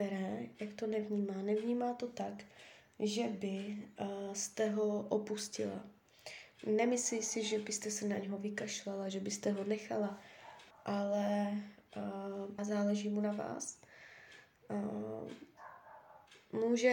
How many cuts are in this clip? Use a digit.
2